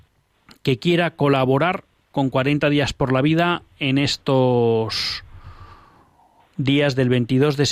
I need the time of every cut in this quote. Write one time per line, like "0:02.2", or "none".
none